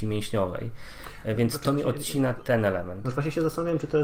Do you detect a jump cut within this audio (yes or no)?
no